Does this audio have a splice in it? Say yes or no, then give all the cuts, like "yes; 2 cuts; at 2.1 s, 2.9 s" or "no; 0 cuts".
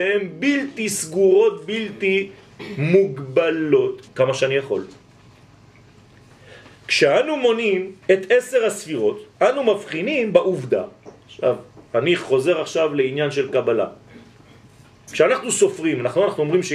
yes; 2 cuts; at 4.1 s, 8.0 s